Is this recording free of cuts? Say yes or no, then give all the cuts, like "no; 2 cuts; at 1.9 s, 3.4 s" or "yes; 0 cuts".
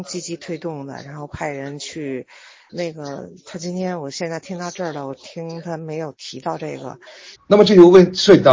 no; 2 cuts; at 2.7 s, 7.3 s